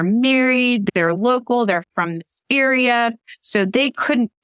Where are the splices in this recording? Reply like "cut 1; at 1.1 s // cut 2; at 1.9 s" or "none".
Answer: cut 1; at 0.9 s